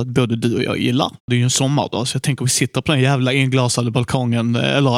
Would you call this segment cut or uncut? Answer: cut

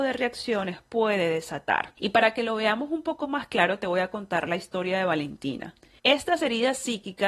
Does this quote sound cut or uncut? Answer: cut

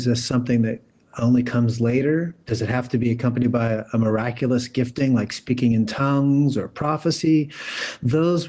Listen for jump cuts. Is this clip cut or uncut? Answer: uncut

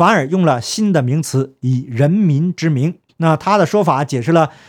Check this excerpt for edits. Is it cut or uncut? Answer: cut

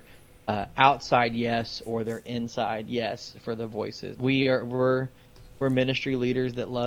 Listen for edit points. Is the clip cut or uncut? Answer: cut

